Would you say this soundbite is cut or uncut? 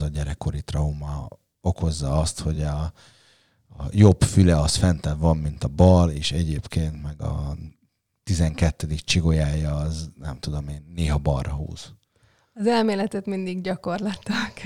uncut